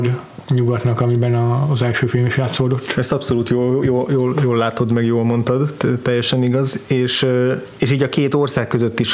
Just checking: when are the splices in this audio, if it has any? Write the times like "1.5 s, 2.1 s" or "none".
none

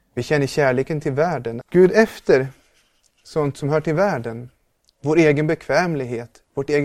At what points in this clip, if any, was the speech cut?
1.6 s

